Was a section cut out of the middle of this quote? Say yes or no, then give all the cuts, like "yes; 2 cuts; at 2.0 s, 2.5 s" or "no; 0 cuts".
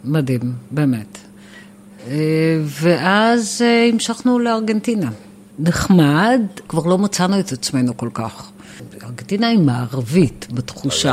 yes; 2 cuts; at 5.5 s, 6.7 s